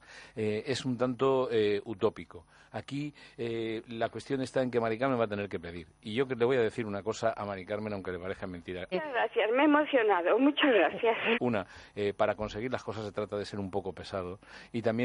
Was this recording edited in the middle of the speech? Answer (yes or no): yes